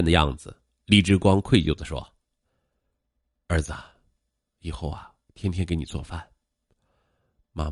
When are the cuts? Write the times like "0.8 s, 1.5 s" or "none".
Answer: 4.4 s